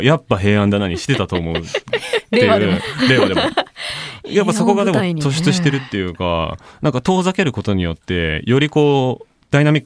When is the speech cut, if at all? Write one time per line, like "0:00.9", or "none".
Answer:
none